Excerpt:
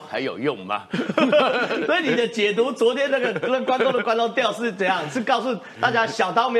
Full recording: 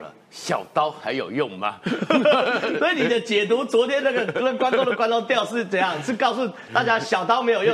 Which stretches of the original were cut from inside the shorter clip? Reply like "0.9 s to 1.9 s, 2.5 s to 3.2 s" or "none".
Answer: none

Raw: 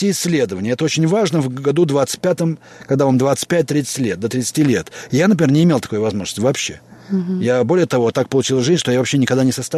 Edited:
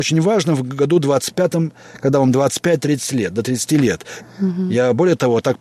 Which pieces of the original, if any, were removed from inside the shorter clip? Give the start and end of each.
5.1 s to 6.9 s

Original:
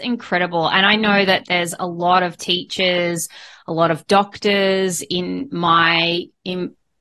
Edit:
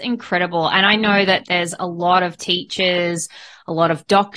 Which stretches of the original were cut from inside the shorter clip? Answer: none

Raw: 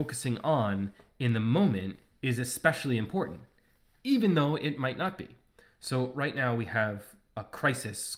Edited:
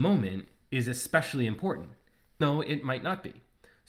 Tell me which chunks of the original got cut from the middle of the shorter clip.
3.9 s to 4.3 s

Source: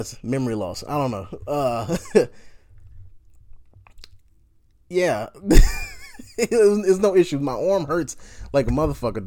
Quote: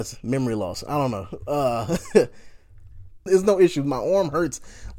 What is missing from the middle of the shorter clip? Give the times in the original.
3.3 s to 6.8 s

